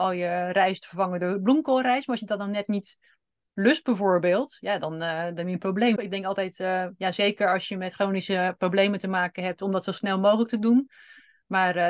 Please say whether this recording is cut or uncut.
cut